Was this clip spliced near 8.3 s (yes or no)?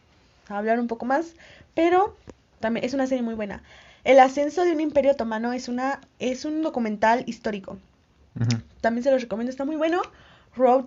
no